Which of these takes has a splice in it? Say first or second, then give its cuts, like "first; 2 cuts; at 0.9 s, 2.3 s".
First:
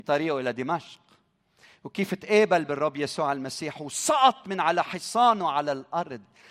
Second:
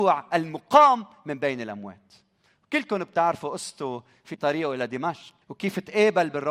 second; 1 cut; at 5.4 s